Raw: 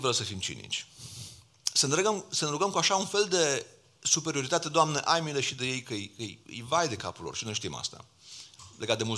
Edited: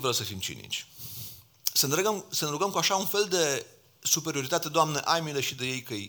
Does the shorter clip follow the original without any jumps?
yes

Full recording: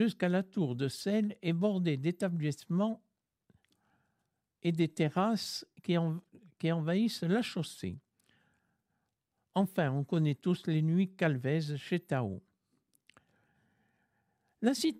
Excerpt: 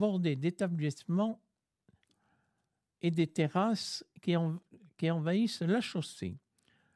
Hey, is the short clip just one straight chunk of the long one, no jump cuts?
yes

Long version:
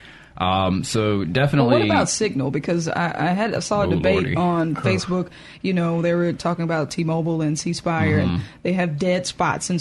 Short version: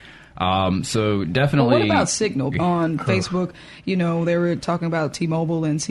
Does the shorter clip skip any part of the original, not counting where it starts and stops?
yes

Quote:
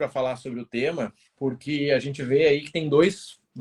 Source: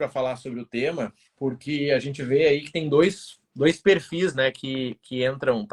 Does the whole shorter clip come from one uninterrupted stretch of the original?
yes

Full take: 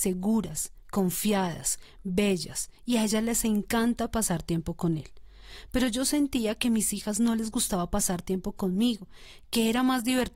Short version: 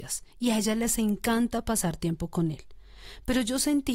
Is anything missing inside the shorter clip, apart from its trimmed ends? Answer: no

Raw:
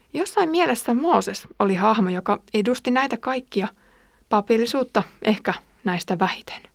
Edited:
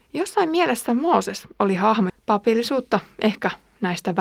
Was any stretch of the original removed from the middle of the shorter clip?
yes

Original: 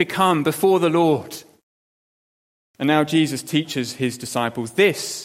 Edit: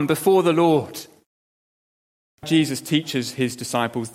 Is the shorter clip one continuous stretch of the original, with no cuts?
no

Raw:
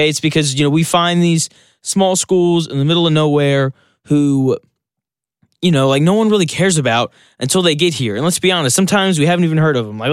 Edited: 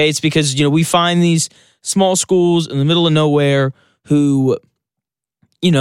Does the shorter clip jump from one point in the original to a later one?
no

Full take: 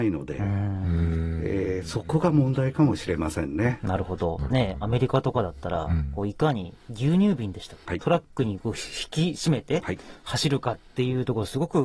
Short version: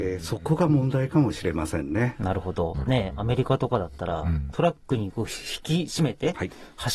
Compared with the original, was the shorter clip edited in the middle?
yes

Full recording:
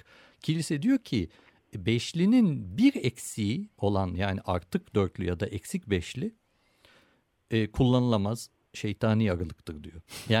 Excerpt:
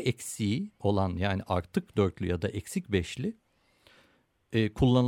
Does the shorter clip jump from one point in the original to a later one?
no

